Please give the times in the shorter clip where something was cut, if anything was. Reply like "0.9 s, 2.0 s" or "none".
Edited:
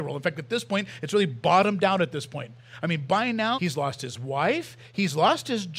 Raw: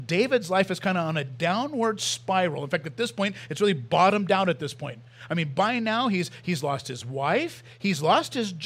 3.5 s